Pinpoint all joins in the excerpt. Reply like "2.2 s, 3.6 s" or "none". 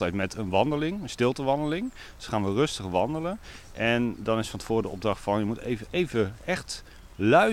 none